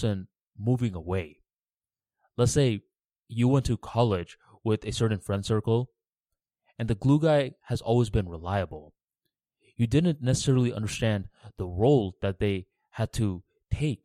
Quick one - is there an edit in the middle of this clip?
no; 0 cuts

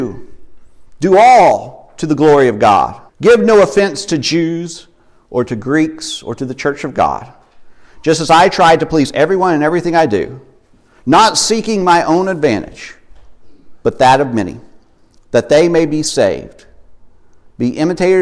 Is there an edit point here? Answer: yes; 1 cut; at 3.1 s

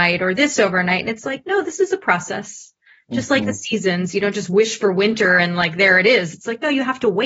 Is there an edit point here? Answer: no; 0 cuts

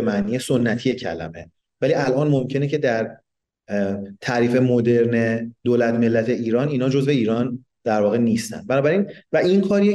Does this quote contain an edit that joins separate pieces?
no; 0 cuts

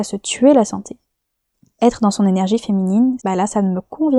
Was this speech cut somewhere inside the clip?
yes; 1 cut; at 3.2 s

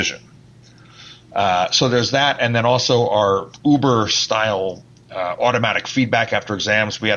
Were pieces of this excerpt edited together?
no; 0 cuts

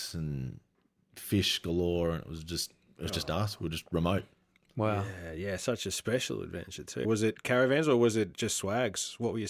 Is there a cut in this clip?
yes; 1 cut; at 7.0 s

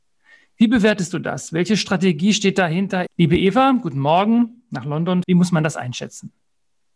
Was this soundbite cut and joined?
yes; 2 cuts; at 3.1 s, 5.2 s

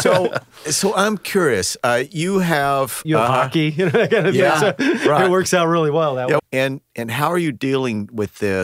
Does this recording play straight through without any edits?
no; 2 cuts; at 3.0 s, 6.4 s

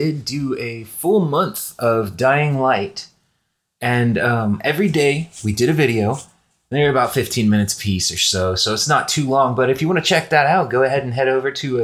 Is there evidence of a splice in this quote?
no; 0 cuts

